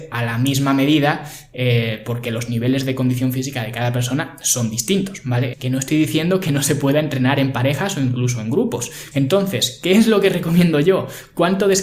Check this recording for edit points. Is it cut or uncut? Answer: cut